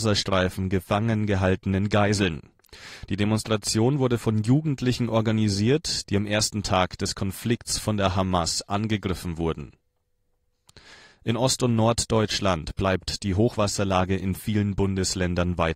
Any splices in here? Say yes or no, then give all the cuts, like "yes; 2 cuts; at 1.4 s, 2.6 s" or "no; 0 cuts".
yes; 1 cut; at 6.1 s